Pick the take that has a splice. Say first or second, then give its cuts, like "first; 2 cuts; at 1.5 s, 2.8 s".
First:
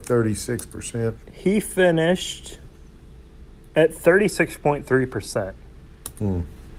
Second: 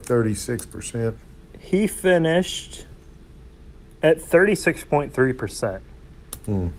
first; 1 cut; at 1.2 s